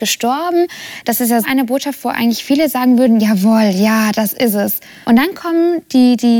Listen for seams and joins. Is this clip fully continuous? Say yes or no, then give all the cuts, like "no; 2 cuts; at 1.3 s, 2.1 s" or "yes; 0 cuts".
no; 2 cuts; at 1.4 s, 5.0 s